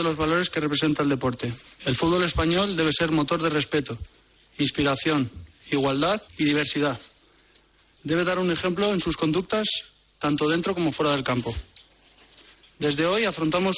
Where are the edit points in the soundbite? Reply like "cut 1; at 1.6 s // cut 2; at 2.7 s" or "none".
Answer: cut 1; at 6.3 s